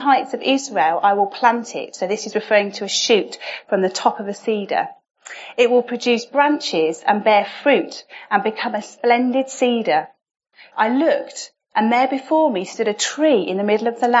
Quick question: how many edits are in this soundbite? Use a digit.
1